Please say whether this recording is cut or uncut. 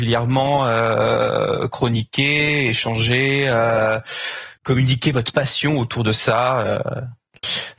uncut